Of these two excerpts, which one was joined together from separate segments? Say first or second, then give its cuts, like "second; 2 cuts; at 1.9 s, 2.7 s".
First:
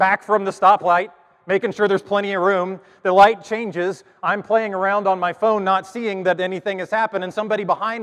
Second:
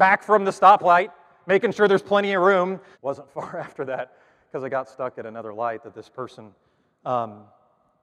second; 1 cut; at 2.9 s